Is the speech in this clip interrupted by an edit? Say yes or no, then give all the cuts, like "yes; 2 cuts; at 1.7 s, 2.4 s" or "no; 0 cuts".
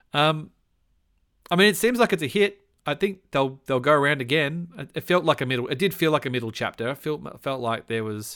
no; 0 cuts